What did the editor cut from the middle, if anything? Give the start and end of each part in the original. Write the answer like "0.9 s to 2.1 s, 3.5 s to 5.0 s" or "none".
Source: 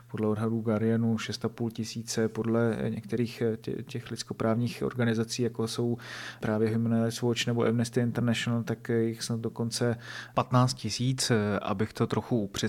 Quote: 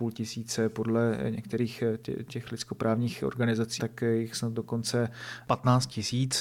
5.4 s to 8.6 s